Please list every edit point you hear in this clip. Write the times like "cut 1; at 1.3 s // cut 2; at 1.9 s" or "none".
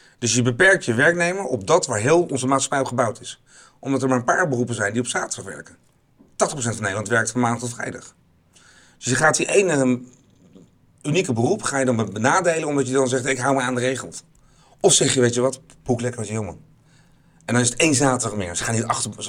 none